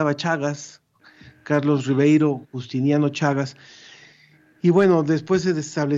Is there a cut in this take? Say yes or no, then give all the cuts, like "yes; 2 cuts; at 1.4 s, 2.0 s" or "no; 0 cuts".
no; 0 cuts